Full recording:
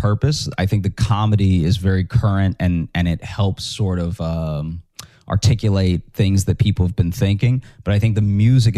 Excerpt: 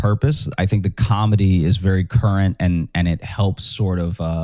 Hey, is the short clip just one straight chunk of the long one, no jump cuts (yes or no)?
yes